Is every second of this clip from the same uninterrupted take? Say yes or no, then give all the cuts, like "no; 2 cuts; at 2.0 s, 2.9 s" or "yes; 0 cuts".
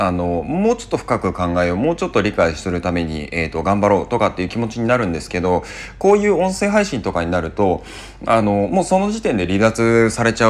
yes; 0 cuts